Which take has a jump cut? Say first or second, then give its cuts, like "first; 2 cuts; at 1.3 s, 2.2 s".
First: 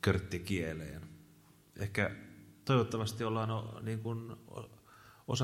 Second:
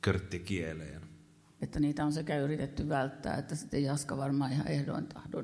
second; 1 cut; at 1.6 s